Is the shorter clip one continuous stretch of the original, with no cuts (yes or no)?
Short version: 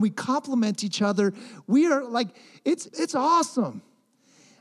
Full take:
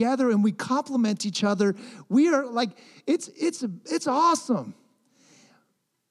no